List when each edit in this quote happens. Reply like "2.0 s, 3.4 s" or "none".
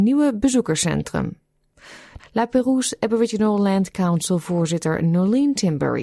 2.2 s

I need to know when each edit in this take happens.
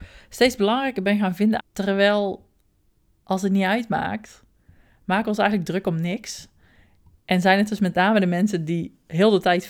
1.6 s

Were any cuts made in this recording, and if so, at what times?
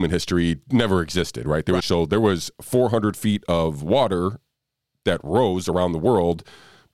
1.8 s

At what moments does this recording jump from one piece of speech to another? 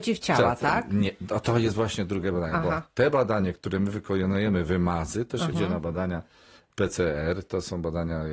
5.5 s

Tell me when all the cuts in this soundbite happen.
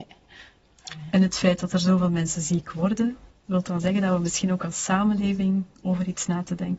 none

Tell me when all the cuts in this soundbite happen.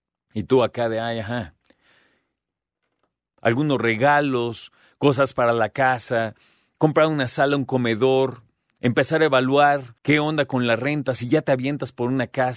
3.3 s, 10.0 s

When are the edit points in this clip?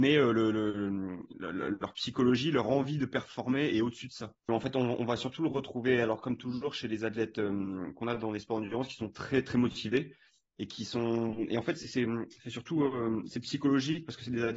4.5 s

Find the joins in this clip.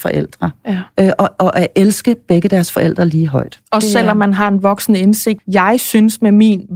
5.4 s

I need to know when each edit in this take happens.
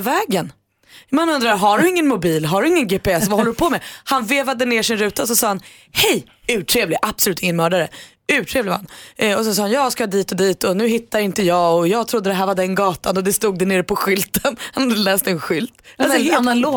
none

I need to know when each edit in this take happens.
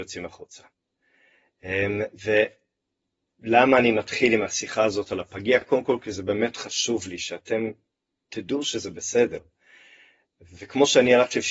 none

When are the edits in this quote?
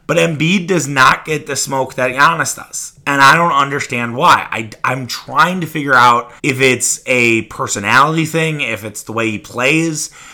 6.4 s

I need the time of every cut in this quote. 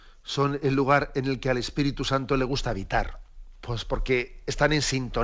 3.5 s

